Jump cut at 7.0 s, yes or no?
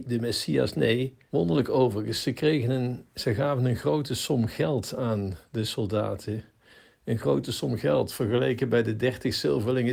no